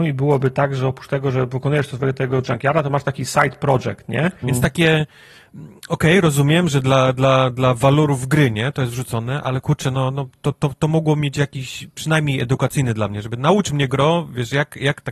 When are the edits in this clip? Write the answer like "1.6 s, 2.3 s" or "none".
4.4 s